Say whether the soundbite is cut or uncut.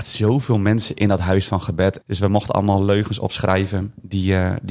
cut